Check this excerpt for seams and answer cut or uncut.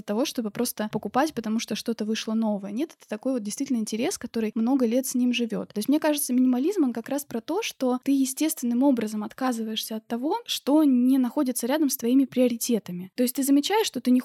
uncut